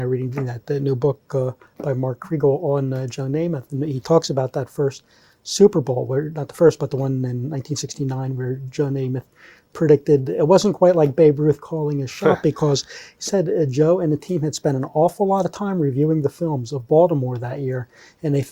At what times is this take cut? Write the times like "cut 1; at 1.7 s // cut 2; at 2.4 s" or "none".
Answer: none